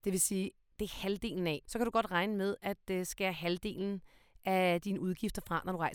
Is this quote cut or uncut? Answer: cut